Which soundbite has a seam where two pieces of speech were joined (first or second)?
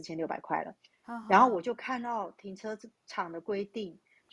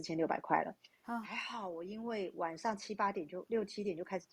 second